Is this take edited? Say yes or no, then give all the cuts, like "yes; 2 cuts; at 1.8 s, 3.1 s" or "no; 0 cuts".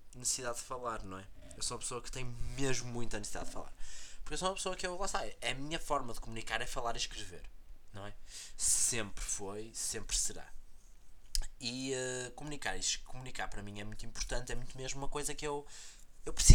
no; 0 cuts